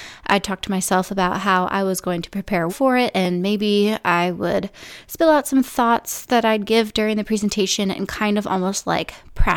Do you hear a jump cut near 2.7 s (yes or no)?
yes